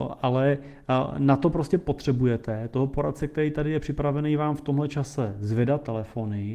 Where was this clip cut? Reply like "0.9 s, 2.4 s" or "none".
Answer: none